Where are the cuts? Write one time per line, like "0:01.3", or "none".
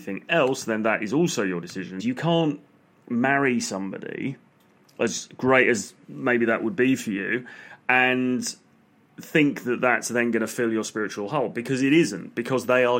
0:02.0